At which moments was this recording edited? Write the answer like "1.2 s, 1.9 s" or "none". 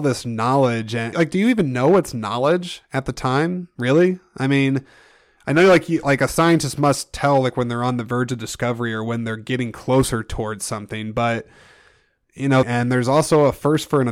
1.1 s, 12.6 s

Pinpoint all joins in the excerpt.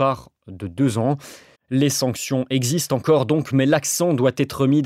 1.5 s

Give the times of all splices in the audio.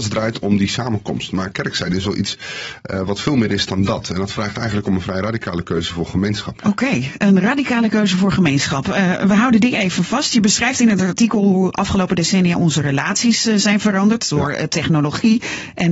6.6 s

